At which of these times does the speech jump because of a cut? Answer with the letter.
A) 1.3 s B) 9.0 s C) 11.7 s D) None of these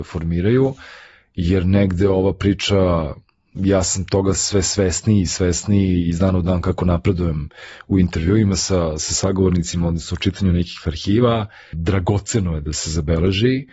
C